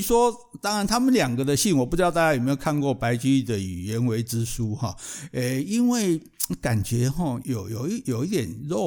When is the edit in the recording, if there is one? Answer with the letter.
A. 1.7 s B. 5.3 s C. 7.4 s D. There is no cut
C